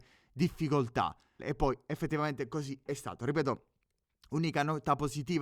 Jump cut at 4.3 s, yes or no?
no